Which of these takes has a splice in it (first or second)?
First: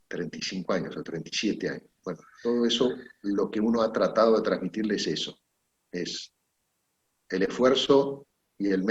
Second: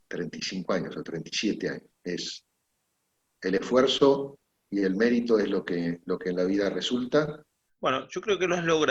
second